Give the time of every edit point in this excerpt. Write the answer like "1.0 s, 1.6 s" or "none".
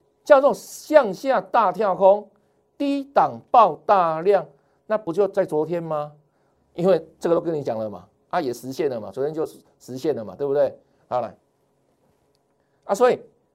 6.5 s, 11.0 s